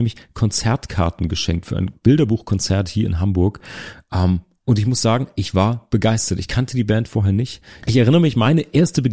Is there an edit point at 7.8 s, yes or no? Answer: yes